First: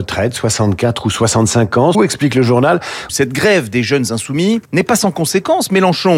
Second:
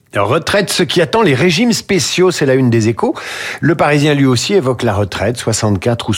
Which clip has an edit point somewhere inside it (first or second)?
first